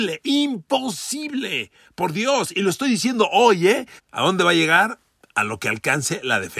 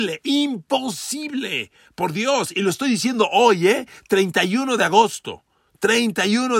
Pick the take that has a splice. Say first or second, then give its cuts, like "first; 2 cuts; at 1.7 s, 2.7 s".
first; 1 cut; at 4.0 s